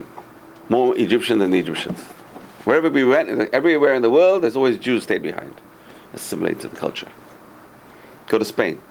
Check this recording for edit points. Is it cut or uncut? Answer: uncut